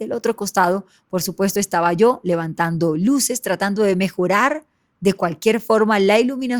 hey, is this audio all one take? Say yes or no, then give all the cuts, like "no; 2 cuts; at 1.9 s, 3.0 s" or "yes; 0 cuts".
yes; 0 cuts